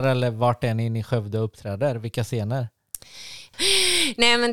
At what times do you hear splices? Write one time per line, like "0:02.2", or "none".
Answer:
0:03.5